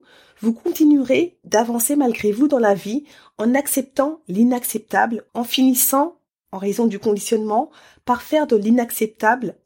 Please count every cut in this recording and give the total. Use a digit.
1